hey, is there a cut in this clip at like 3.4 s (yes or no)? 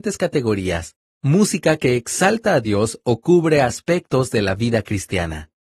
no